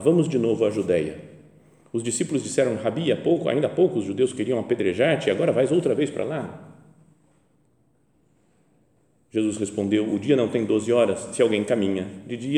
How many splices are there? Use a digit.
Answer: 0